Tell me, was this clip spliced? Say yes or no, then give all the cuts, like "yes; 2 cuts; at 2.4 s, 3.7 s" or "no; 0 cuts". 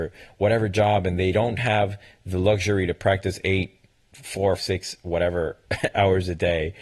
yes; 1 cut; at 4.6 s